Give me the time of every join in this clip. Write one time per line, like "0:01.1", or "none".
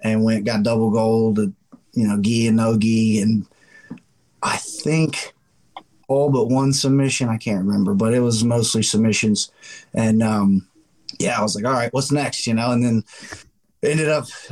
none

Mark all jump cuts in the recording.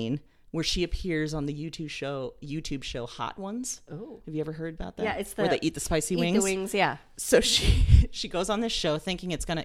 none

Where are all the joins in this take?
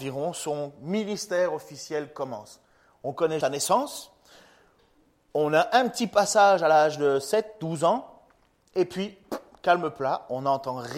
0:03.4

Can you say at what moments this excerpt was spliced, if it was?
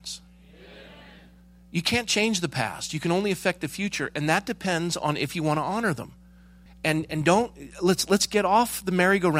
0:06.7

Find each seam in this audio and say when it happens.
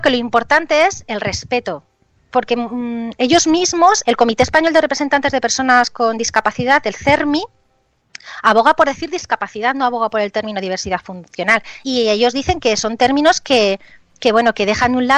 0:04.0
0:11.8

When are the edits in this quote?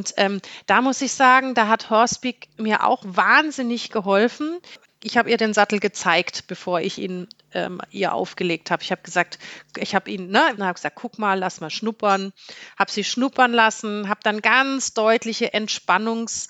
0:10.6

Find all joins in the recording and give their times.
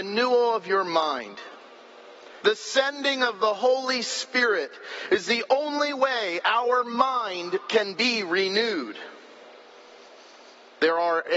0:02.4

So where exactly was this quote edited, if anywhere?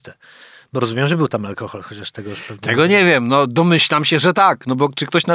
none

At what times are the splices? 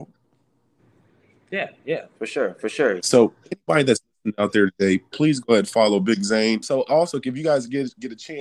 0:03.0
0:06.6

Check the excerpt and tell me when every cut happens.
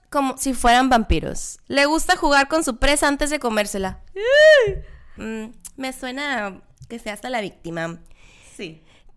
0:01.6
0:05.2

